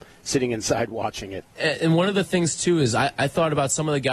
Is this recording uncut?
no; 1 cut; at 1.6 s

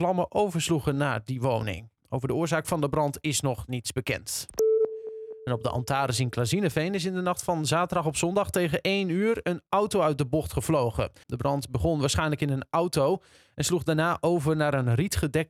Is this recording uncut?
no; 1 cut; at 11.2 s

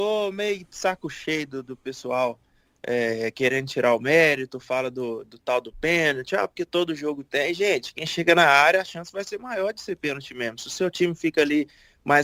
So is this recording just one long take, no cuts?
yes; 0 cuts

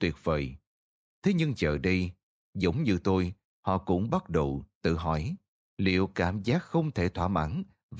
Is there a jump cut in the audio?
yes; 1 cut; at 1.0 s

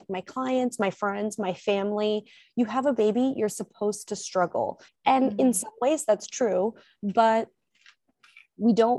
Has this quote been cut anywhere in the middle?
yes; 1 cut; at 4.9 s

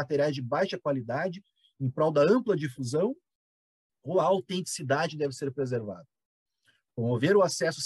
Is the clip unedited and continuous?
yes; 0 cuts

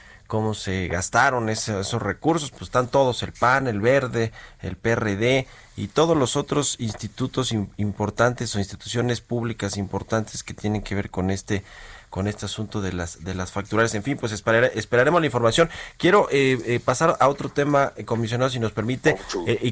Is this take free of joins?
no; 1 cut; at 2.5 s

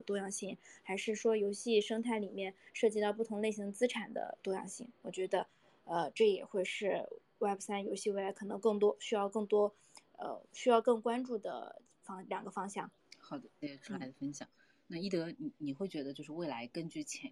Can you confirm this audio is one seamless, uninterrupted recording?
yes; 0 cuts

